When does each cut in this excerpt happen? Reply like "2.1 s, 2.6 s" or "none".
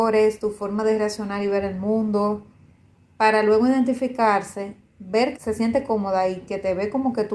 5.4 s